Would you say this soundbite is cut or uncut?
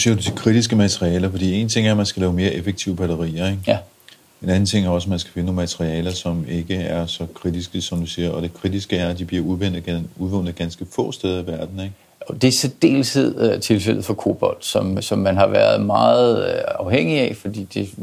cut